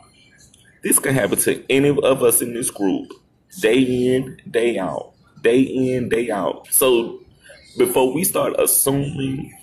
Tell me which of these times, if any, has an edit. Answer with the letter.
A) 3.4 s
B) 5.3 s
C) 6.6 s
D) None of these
C